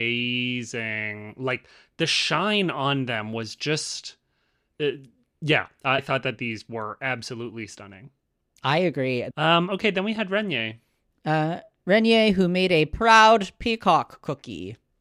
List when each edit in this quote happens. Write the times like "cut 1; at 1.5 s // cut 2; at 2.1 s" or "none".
cut 1; at 6.0 s // cut 2; at 9.3 s